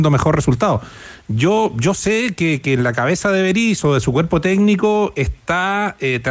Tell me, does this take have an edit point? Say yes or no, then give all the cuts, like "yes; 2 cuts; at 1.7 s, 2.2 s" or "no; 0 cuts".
no; 0 cuts